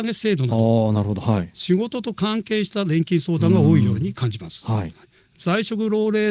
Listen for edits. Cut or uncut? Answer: uncut